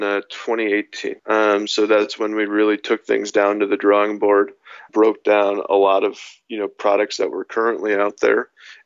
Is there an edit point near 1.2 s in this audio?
yes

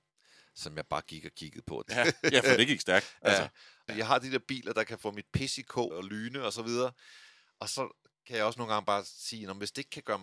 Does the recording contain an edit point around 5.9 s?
yes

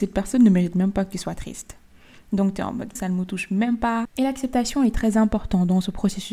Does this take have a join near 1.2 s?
no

